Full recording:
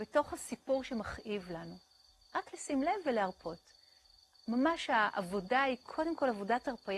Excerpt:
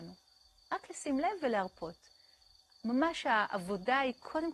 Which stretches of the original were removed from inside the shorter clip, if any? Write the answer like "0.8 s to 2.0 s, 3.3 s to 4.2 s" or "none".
none